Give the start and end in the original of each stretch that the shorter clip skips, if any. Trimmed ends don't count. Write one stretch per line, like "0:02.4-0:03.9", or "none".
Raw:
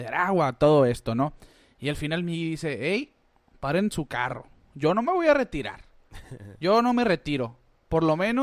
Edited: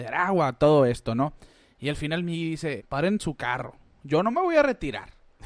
0:02.8-0:03.5